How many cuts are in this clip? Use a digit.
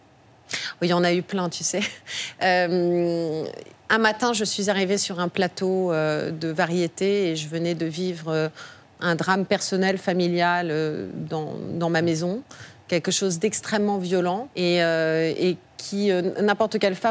1